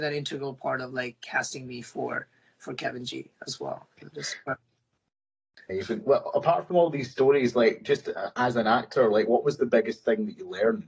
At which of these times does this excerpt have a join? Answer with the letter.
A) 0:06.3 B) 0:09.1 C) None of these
C